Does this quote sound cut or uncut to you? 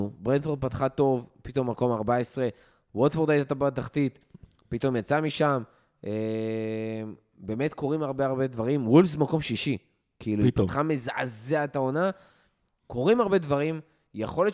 uncut